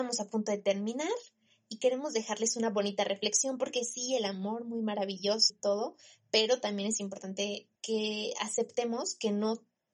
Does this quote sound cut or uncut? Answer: cut